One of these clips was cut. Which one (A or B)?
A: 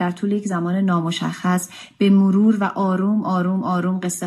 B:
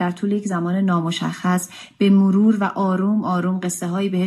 B